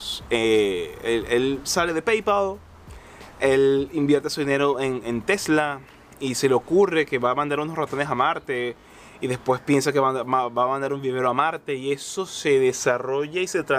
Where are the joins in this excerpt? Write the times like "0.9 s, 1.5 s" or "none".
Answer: none